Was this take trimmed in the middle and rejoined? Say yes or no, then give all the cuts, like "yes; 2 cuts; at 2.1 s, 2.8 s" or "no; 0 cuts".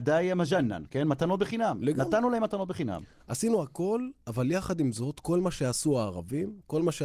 no; 0 cuts